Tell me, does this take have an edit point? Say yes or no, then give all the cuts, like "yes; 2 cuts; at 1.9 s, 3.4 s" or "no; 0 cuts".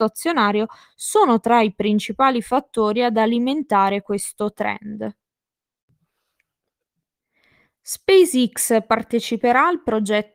no; 0 cuts